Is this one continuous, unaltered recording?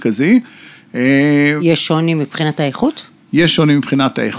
no; 1 cut; at 1.6 s

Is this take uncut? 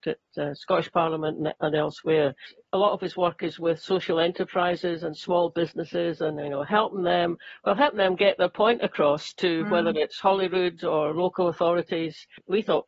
no; 1 cut; at 1.6 s

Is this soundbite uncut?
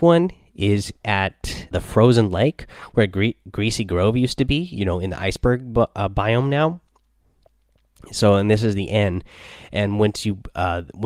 no; 1 cut; at 1.7 s

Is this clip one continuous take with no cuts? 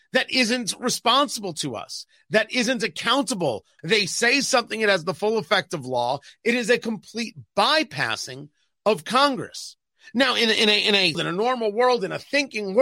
no; 2 cuts; at 3.8 s, 11.1 s

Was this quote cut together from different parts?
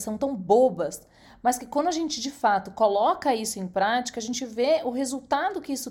no; 0 cuts

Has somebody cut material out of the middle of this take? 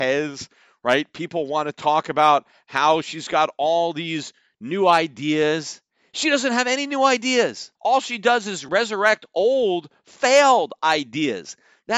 yes; 1 cut; at 7.8 s

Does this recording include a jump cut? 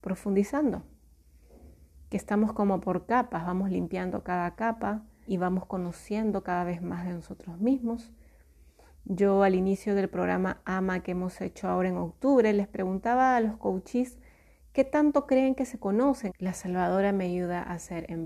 yes; 2 cuts; at 5.3 s, 16.3 s

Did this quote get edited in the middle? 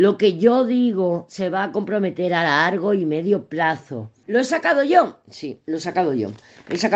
yes; 2 cuts; at 4.2 s, 5.6 s

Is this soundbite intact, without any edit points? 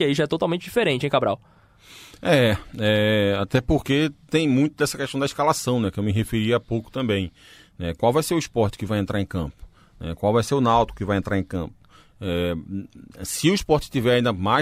yes; 0 cuts

